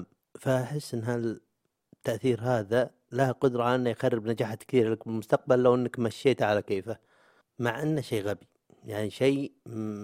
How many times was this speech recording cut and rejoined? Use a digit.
0